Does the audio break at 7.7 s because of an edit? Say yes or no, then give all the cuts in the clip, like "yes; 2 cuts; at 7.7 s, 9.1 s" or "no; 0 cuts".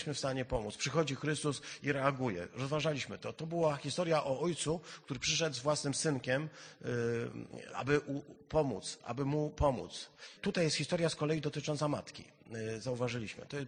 yes; 1 cut; at 7.7 s